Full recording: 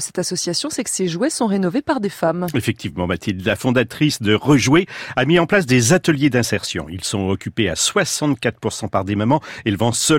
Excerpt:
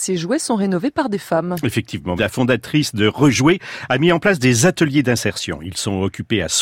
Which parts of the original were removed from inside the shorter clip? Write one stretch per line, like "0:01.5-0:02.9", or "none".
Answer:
0:03.1-0:03.4